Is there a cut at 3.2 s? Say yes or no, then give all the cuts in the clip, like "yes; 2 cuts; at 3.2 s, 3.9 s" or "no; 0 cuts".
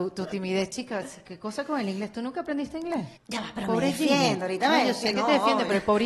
yes; 1 cut; at 3.2 s